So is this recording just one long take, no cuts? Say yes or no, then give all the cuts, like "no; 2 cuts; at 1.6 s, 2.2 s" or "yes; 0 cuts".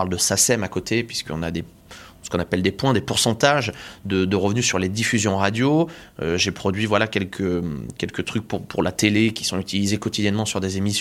yes; 0 cuts